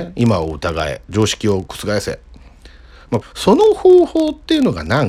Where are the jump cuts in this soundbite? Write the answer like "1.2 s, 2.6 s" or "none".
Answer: 3.2 s